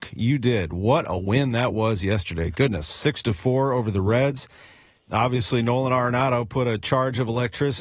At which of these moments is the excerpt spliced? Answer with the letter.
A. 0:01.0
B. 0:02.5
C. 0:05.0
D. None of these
C